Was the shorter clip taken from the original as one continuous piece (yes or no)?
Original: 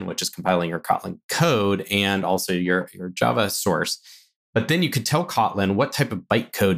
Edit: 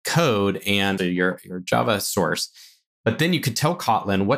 no